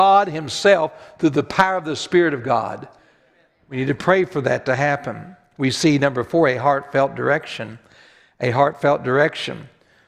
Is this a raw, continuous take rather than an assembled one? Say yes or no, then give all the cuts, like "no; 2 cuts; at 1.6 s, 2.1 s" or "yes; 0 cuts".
yes; 0 cuts